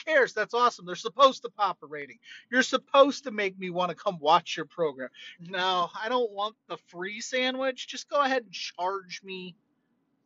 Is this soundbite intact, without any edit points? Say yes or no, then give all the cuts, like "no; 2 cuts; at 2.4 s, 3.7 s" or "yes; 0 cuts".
no; 1 cut; at 5.4 s